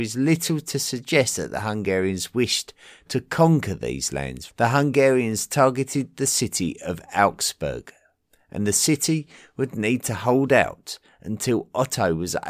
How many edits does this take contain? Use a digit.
1